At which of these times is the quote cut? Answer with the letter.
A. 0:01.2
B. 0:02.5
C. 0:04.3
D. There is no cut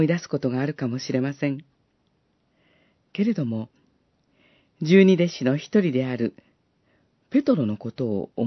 D